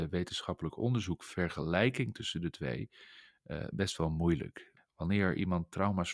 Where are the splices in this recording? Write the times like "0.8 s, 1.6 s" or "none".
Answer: 4.8 s